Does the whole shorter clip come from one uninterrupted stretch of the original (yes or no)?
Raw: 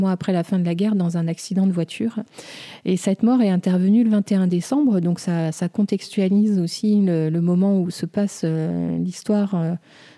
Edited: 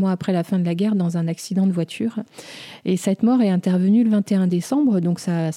yes